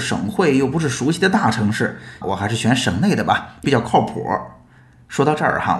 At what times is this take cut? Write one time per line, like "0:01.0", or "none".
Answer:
0:02.2
0:03.6